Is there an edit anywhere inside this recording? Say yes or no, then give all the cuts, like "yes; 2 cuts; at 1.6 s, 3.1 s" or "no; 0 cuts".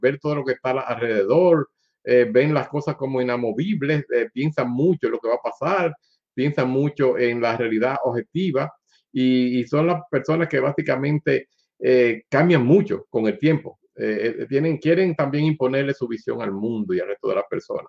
no; 0 cuts